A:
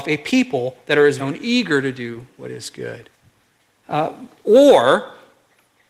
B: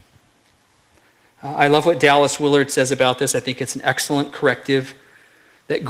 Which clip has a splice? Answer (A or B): A